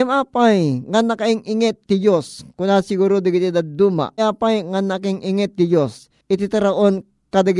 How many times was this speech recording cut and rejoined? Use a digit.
1